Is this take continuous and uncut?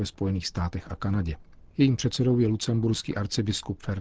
yes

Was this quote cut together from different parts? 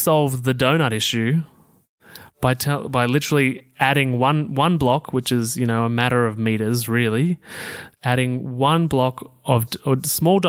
no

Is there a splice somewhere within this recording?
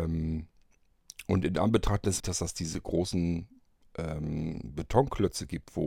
yes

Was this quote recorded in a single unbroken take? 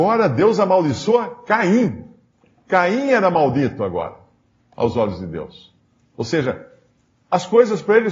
yes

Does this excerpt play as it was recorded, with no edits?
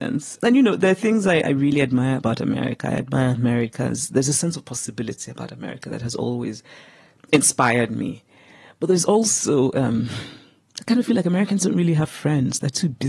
yes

